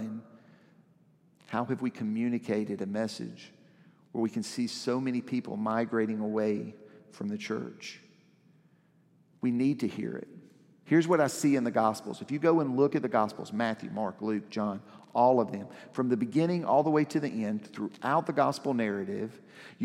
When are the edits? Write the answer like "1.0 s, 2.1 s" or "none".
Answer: 10.8 s